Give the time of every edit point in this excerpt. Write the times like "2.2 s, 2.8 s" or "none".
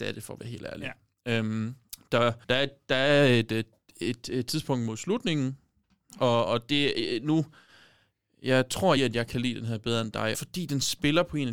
2.4 s, 9.0 s, 10.3 s